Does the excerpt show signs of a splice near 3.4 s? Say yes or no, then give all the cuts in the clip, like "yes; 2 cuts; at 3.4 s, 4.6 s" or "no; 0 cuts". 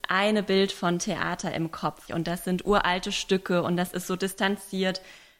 no; 1 cut; at 2.1 s